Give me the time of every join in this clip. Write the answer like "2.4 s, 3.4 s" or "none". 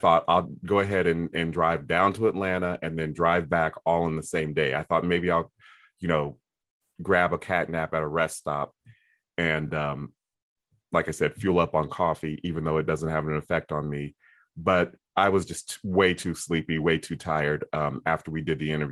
none